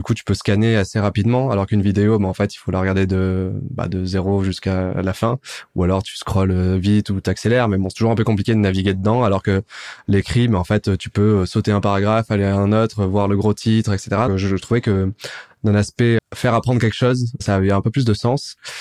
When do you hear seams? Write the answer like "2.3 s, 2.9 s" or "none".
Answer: 14.3 s, 16.2 s

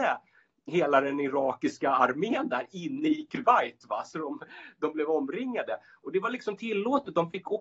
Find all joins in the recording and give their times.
none

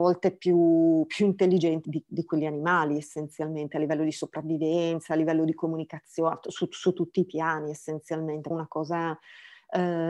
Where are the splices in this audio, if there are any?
1.8 s, 8.5 s

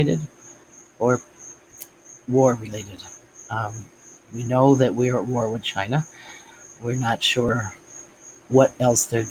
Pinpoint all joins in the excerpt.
none

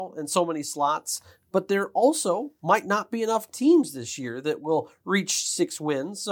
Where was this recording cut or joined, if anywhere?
none

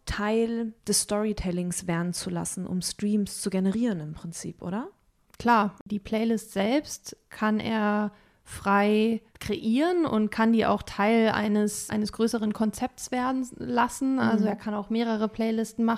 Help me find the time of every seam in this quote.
none

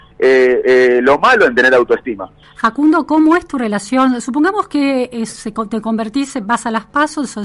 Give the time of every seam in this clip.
2.4 s

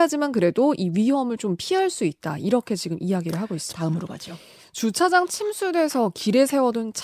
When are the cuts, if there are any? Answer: 3.7 s

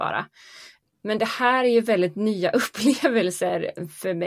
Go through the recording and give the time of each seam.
none

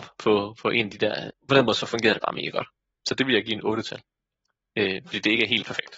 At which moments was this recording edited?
1.3 s

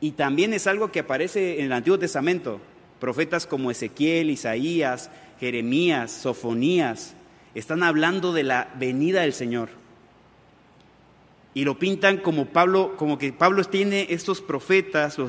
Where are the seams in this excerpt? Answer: none

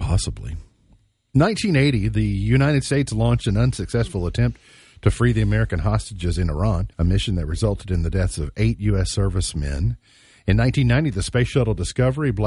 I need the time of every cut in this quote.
6.9 s

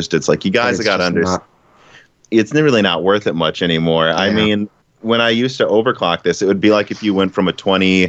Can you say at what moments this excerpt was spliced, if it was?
none

